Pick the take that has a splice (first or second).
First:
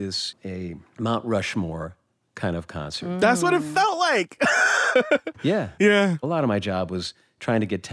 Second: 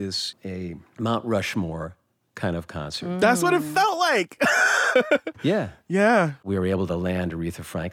first